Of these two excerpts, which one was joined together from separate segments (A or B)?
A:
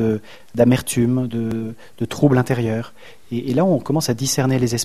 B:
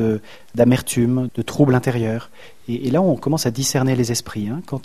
B